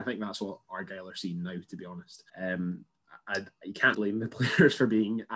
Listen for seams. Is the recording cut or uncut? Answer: cut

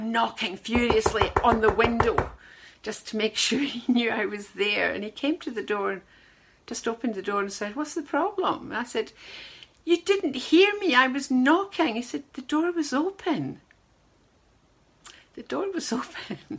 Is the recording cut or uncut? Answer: uncut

